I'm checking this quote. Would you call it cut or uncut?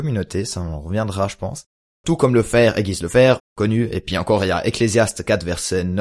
cut